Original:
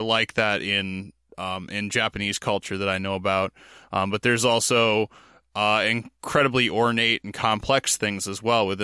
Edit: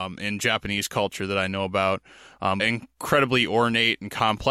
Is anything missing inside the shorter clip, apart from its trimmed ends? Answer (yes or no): yes